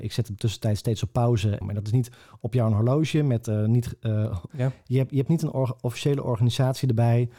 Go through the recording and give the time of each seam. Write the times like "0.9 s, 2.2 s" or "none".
1.6 s, 4.5 s